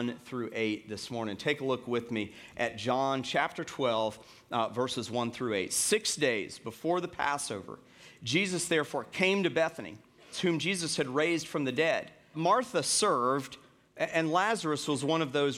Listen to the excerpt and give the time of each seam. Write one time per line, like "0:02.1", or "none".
0:10.3
0:12.3